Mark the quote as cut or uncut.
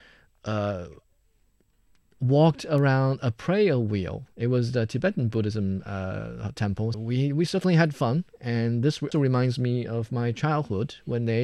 cut